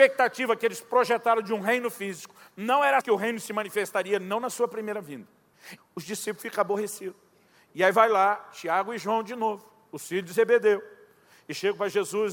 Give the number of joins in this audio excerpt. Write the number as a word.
two